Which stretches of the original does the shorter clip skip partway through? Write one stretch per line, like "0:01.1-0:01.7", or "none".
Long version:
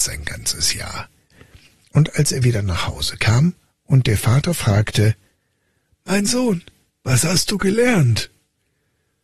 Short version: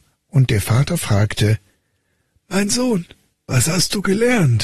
none